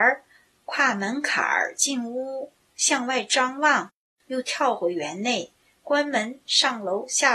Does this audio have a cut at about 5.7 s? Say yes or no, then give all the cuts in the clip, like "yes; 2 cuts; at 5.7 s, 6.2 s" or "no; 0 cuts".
no; 1 cut; at 2.7 s